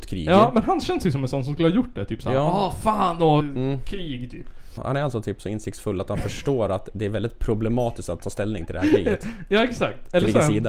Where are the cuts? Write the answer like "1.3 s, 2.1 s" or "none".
3.4 s, 4.8 s